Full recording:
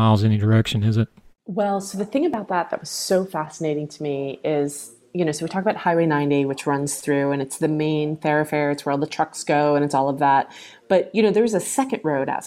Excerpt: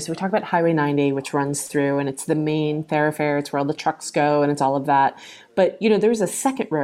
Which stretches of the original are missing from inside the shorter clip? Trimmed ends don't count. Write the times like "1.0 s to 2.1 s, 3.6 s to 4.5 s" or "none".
none